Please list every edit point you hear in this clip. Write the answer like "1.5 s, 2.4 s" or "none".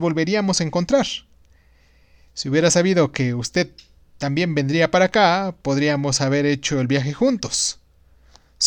none